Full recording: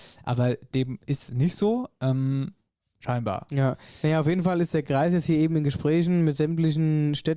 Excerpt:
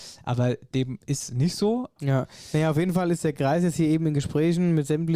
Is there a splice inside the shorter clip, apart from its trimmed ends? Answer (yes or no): yes